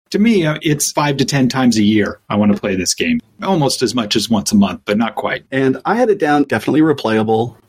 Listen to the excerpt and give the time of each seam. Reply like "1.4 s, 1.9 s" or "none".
5.5 s